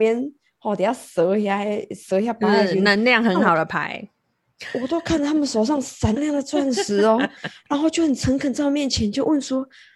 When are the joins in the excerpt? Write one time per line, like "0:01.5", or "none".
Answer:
0:06.2